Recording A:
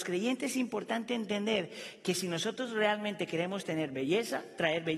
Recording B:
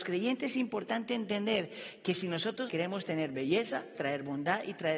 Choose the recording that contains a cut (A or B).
B